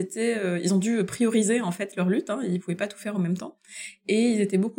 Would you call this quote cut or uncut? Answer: uncut